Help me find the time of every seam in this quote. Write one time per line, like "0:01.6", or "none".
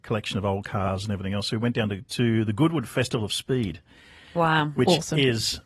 none